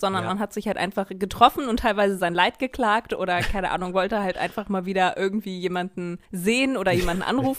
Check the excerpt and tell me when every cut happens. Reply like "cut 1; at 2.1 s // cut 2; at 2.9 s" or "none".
cut 1; at 6.2 s